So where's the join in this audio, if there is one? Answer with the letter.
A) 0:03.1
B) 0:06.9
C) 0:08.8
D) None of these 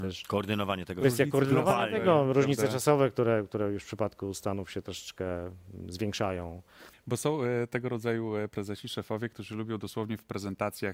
B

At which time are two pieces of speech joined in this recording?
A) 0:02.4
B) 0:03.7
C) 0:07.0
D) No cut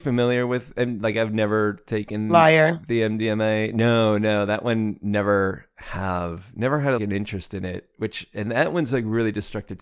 C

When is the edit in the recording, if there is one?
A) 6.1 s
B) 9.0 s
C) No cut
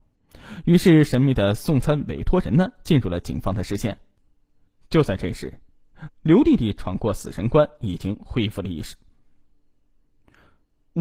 A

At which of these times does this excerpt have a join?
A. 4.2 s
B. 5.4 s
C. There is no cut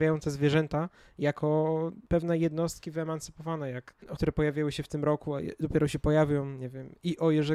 A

